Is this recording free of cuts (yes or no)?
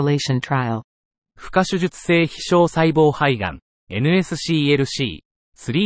yes